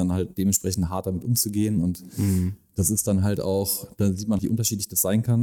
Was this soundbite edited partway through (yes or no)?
yes